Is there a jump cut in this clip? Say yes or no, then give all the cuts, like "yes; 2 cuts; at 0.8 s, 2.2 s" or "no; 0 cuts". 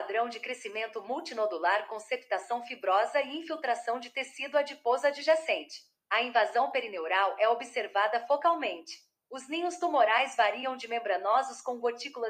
no; 0 cuts